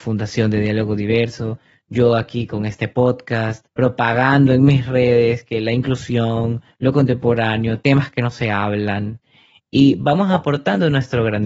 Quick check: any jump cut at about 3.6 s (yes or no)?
yes